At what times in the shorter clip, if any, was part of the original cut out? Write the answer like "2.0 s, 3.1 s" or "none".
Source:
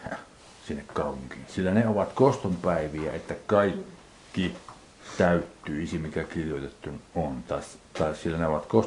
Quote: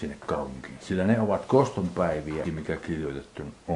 2.4 s

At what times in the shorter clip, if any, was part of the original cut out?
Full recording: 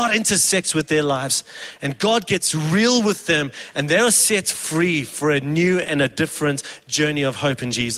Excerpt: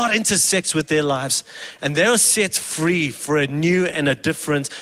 1.8 s

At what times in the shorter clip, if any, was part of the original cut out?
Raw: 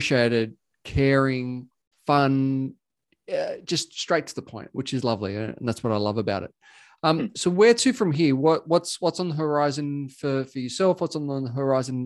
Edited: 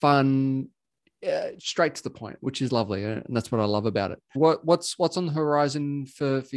1.6 s, 4.3 s

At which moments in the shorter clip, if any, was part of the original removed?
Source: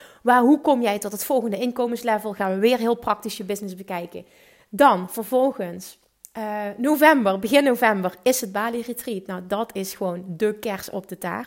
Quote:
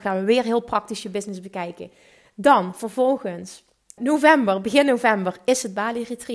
4.0 s

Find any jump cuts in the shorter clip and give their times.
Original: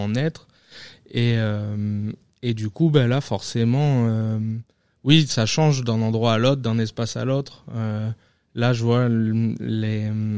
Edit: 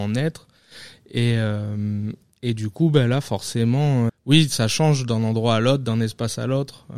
4.1 s

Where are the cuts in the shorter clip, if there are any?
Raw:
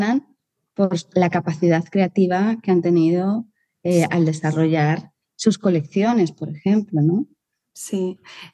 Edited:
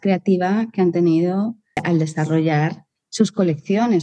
1.8 s

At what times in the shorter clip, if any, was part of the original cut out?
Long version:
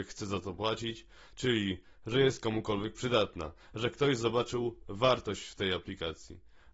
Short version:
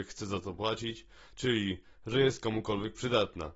none

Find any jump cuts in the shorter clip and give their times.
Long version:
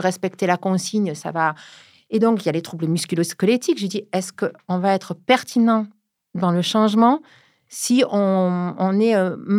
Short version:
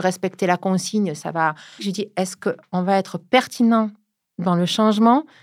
1.8 s

